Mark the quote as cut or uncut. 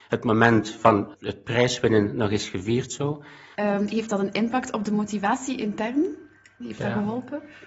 cut